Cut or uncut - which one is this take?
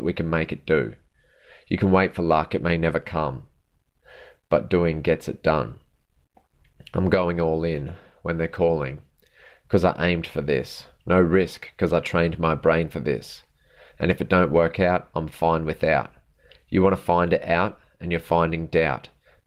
uncut